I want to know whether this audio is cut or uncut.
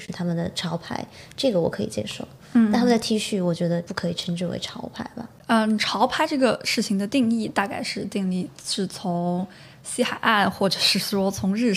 uncut